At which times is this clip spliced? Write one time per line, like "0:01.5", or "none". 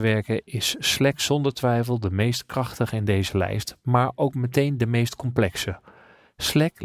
none